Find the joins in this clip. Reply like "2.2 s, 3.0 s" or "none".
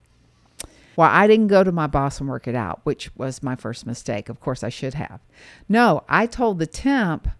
1.0 s